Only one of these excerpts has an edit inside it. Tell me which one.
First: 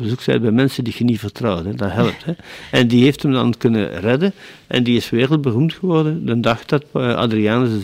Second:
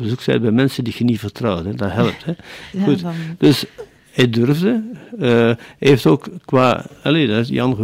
second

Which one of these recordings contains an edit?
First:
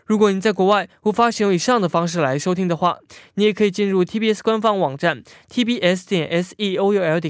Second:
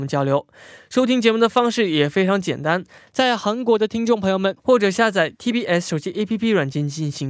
second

